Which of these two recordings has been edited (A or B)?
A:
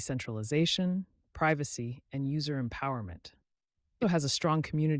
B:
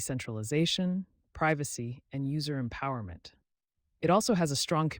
A